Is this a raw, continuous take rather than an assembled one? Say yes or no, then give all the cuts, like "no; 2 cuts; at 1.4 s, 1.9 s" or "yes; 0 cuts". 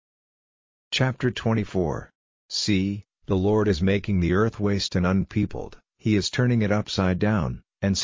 yes; 0 cuts